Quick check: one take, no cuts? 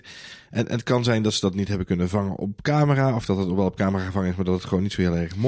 yes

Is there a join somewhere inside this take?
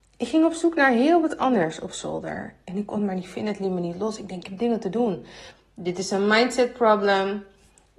yes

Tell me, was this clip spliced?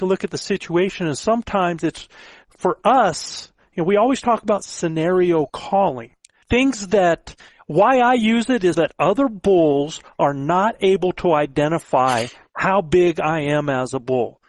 yes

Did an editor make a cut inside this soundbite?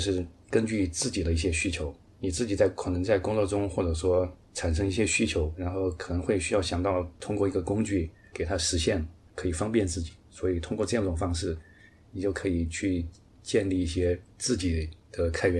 no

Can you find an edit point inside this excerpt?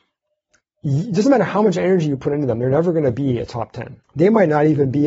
yes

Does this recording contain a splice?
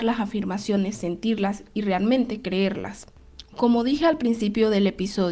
no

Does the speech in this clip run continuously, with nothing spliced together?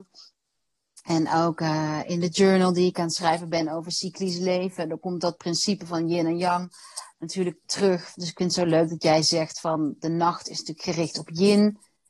yes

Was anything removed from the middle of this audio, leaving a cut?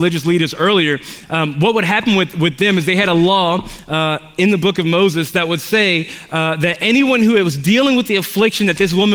no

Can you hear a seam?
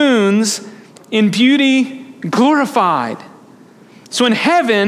yes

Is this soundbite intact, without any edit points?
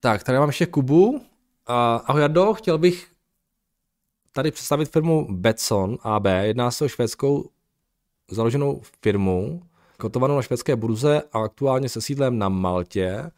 no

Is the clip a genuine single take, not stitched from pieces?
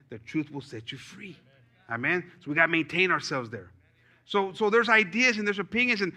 yes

